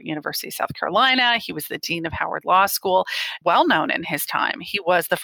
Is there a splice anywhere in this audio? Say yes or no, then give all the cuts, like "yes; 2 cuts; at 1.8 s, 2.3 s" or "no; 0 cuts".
yes; 1 cut; at 3.4 s